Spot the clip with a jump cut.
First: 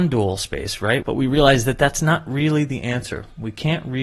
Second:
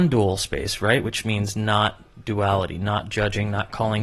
first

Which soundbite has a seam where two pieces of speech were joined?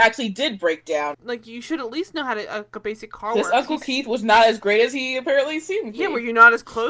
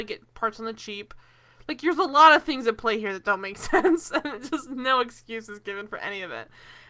first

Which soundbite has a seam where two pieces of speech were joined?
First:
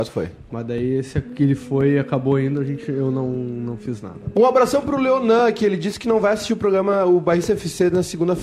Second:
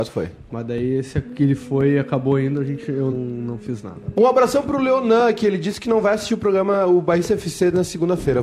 second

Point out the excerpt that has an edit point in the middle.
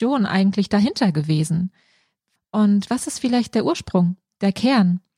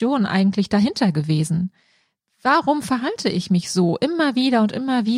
first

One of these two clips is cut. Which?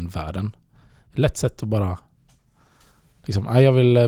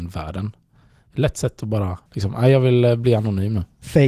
second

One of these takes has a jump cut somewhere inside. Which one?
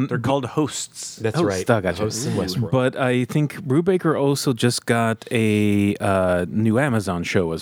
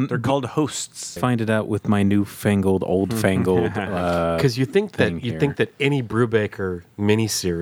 second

